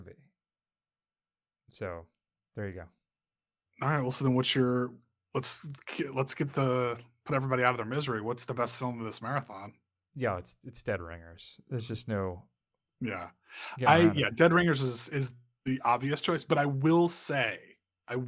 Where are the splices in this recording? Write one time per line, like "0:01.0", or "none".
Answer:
none